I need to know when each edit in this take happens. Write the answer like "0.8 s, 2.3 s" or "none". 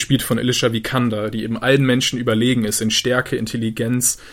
none